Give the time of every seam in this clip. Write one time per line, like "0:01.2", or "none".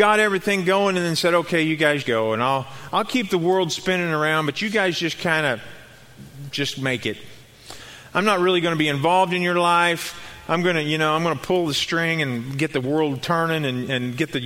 0:02.0